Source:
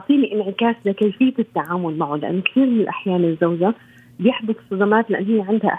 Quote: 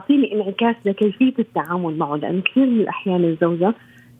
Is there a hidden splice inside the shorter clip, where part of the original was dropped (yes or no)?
no